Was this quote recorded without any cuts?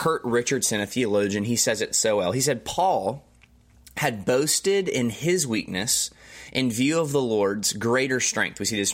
yes; 0 cuts

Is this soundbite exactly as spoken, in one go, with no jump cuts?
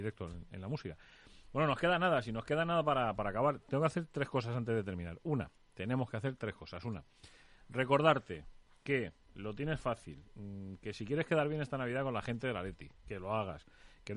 yes; 0 cuts

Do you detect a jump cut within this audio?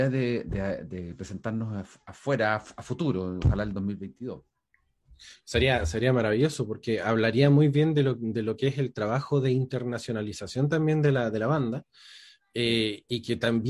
no; 0 cuts

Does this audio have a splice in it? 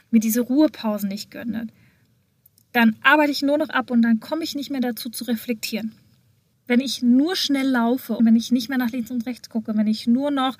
yes; 2 cuts; at 6.5 s, 8.2 s

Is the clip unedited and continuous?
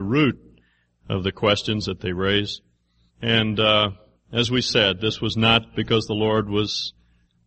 no; 1 cut; at 3.1 s

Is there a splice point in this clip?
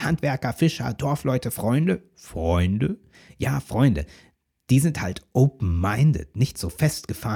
no; 0 cuts

